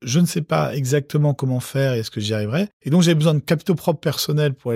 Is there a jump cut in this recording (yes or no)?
yes